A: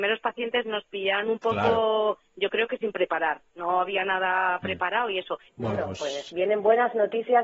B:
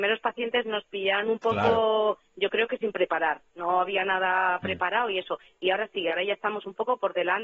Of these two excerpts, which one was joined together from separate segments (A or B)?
A